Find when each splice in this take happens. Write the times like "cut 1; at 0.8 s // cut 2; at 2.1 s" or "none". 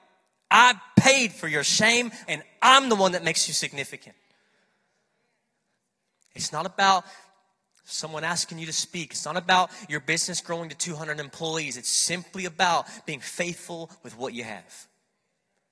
cut 1; at 2.3 s